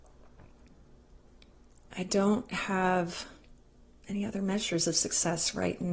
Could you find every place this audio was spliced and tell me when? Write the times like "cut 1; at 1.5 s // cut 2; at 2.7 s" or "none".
none